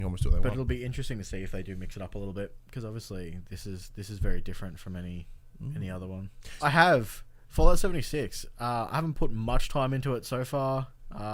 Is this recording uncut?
no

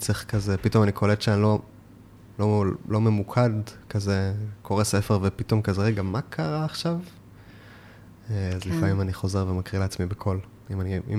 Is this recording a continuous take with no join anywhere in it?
yes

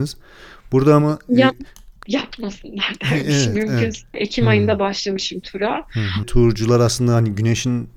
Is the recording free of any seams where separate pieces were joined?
no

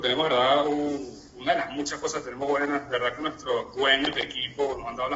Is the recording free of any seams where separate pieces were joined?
yes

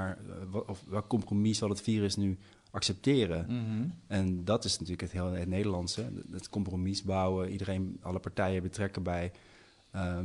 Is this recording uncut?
yes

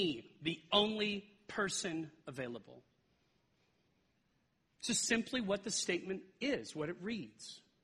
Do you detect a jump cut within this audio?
no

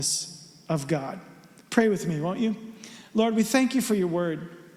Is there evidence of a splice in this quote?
no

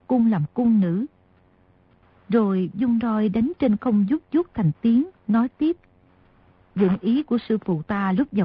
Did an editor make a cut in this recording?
no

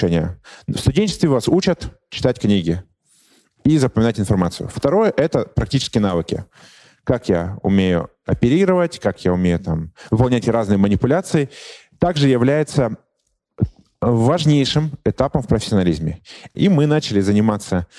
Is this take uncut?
no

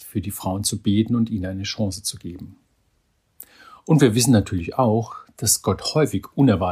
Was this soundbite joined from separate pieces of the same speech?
no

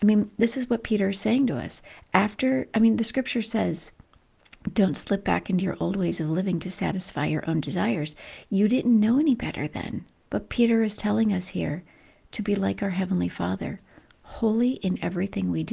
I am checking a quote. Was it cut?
yes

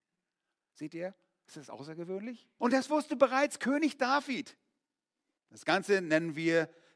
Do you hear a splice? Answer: yes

